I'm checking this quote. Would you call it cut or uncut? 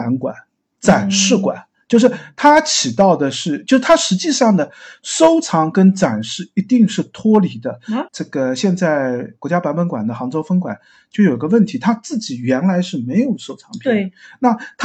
cut